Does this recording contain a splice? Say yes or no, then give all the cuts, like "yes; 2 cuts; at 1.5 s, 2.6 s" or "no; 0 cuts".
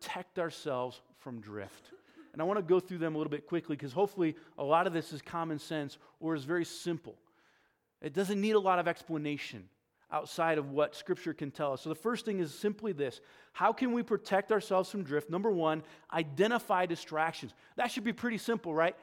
no; 0 cuts